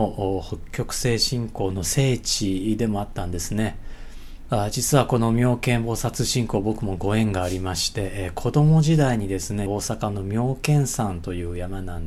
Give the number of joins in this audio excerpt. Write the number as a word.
two